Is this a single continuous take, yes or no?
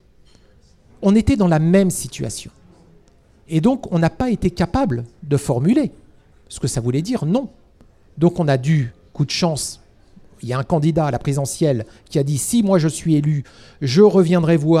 yes